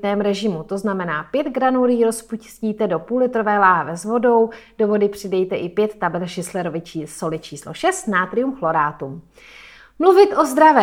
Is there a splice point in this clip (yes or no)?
no